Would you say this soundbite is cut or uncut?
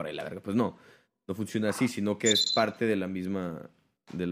uncut